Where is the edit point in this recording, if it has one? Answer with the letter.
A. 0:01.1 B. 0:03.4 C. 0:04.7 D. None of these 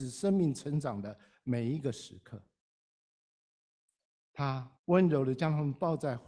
C